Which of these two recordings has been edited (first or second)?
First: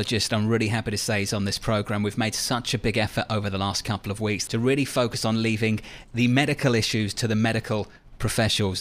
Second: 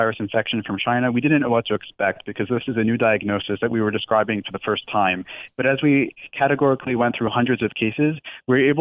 first